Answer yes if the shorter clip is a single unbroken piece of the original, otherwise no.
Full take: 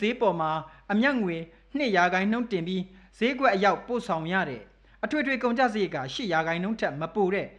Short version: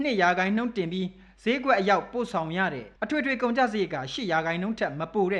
no